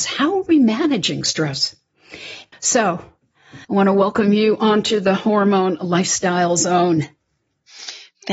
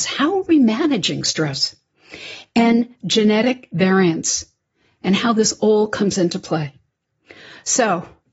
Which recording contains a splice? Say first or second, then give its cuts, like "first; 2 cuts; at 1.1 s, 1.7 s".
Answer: first; 2 cuts; at 2.5 s, 3.6 s